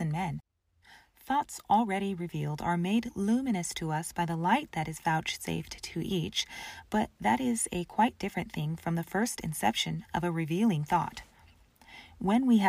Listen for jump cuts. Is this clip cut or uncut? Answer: uncut